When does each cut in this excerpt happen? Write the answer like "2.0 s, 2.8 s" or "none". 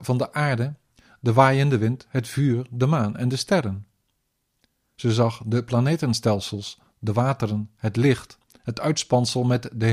none